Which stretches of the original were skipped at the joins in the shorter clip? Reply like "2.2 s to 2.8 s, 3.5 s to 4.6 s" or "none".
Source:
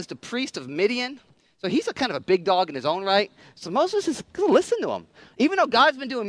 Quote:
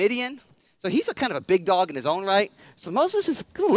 none